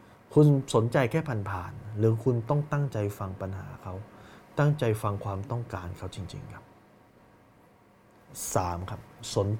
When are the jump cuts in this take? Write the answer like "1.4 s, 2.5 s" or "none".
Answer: none